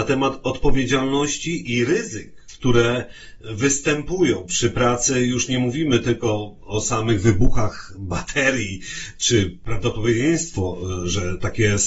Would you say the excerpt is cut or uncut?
uncut